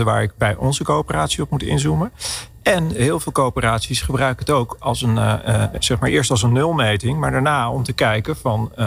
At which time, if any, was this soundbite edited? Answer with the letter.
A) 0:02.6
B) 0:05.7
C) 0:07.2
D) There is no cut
B